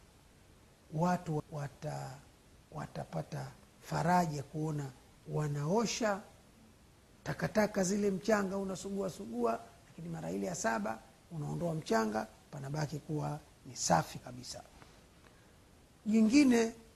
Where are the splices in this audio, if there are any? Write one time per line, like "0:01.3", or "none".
0:01.4
0:14.2